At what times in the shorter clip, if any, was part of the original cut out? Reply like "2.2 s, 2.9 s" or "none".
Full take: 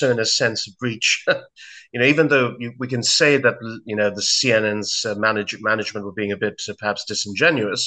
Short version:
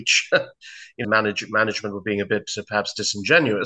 1.0 s

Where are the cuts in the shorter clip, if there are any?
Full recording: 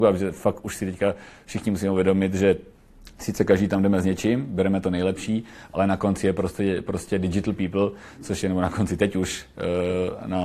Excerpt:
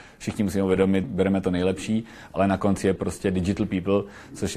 1.0 s, 3.0 s

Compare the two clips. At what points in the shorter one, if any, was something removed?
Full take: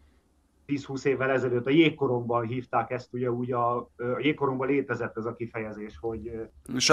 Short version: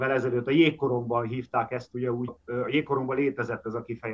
2.3 s

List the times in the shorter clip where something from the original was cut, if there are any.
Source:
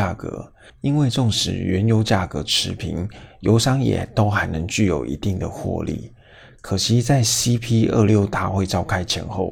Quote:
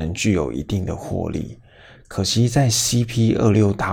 none

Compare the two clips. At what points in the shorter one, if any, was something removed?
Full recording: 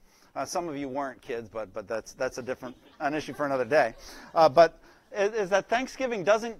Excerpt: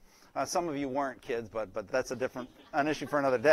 1.9 s

